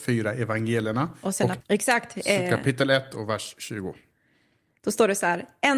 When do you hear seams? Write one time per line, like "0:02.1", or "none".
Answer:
0:01.6